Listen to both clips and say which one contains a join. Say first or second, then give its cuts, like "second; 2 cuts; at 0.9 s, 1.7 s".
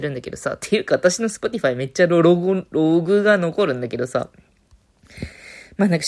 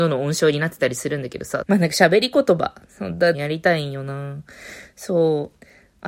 second; 2 cuts; at 1.6 s, 3.3 s